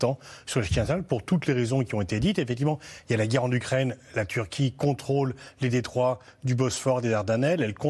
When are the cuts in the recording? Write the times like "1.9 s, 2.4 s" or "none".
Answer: none